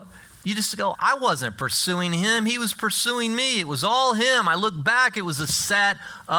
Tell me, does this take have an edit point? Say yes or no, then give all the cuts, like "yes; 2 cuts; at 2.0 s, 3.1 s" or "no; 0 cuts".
yes; 1 cut; at 0.9 s